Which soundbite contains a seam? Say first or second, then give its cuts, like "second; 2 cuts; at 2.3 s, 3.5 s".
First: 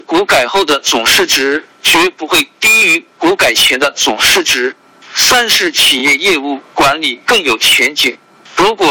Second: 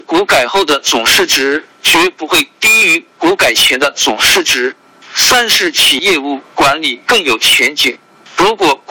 second; 1 cut; at 6.0 s